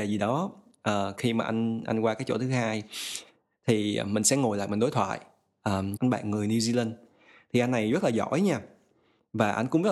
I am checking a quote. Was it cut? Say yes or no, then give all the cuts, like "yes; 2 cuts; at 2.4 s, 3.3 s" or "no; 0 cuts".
yes; 1 cut; at 6.0 s